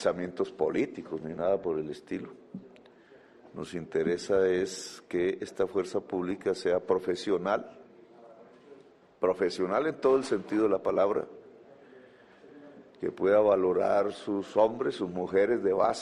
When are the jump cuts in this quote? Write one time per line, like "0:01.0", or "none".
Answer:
none